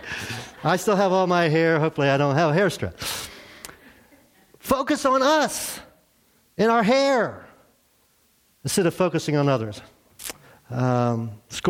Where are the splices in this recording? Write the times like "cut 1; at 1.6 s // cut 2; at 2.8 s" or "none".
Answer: none